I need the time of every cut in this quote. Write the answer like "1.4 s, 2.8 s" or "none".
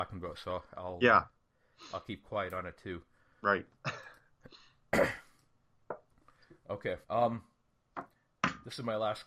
7.0 s